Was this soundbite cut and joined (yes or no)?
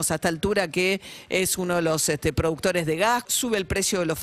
yes